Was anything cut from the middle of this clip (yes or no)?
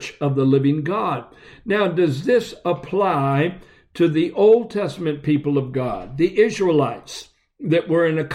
no